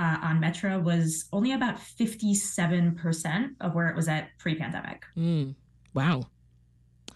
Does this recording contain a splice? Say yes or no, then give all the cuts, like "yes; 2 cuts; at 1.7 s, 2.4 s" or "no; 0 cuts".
no; 0 cuts